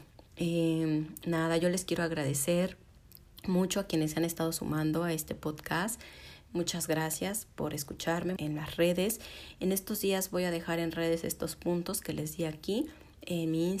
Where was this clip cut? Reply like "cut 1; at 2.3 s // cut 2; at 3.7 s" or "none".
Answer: cut 1; at 8.4 s